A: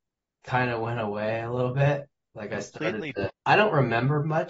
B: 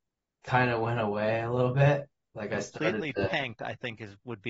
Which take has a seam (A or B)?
A